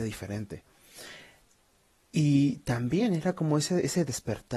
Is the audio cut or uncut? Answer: uncut